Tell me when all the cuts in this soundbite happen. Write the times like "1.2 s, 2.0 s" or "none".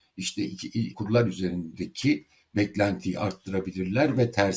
0.9 s

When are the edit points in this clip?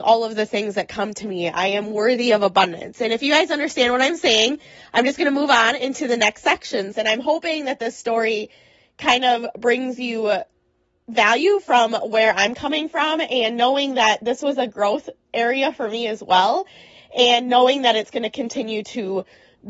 6.9 s

